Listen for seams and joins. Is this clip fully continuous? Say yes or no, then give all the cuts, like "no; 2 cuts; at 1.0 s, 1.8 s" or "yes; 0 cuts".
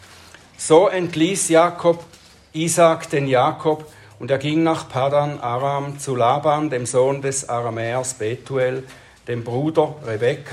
yes; 0 cuts